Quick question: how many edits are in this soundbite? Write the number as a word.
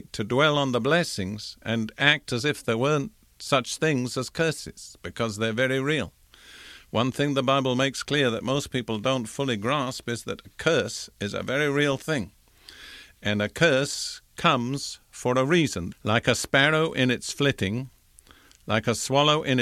one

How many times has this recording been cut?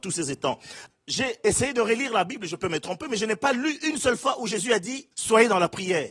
two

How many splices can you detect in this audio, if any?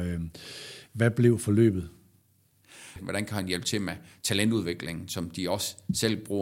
one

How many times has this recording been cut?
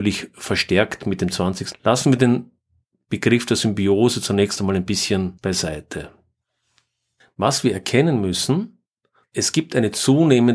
two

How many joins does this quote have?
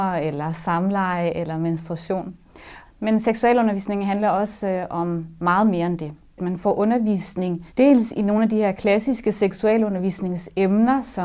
two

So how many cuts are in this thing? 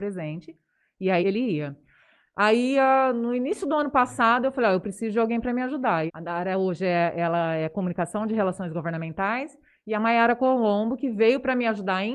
two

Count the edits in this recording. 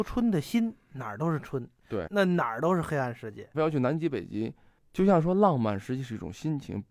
two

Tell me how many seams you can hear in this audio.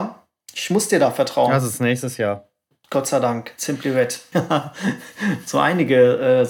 one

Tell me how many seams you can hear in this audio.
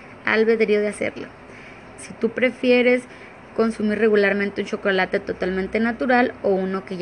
two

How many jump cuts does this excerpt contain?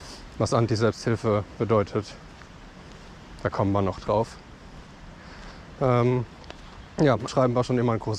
one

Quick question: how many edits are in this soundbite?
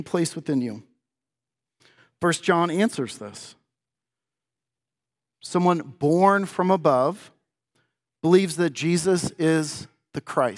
zero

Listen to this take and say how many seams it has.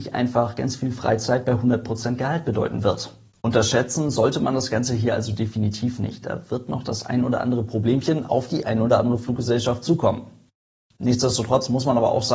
zero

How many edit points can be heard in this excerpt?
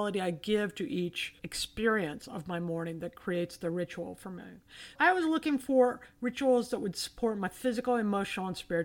two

